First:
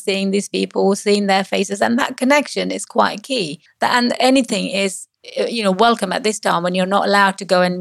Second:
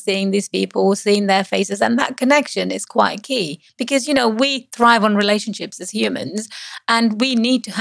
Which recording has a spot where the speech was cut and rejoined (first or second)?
first